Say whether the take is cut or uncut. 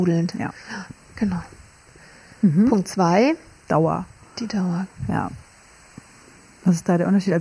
uncut